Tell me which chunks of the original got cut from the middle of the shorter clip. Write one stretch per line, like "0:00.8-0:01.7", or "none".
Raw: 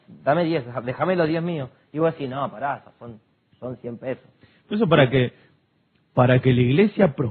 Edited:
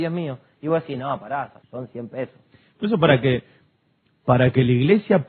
0:02.9-0:03.5